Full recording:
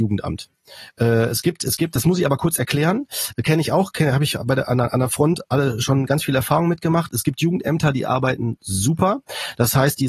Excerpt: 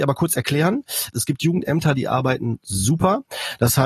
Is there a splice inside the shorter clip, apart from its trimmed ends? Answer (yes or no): yes